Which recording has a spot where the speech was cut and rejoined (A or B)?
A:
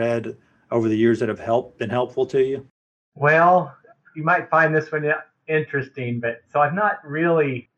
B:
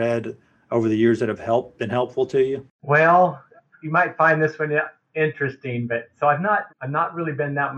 B